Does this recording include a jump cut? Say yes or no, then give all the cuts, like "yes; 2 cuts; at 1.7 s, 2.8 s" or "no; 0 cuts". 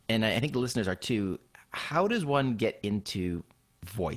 no; 0 cuts